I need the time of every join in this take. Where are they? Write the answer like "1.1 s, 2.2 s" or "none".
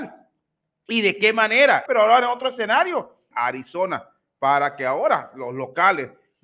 1.9 s, 3.3 s